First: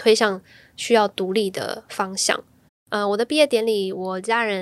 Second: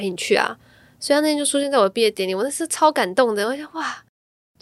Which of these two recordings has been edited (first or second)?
first